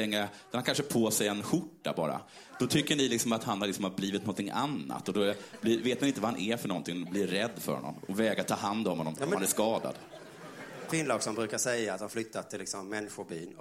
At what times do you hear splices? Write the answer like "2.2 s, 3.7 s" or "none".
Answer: 10.9 s